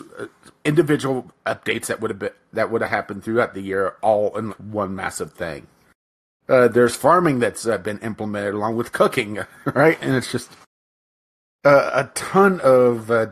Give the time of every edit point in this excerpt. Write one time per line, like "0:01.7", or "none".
0:04.5